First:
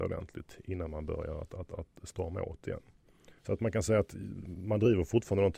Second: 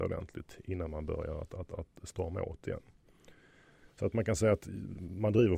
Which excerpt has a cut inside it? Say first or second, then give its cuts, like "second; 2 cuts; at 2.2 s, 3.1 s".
first; 1 cut; at 3.4 s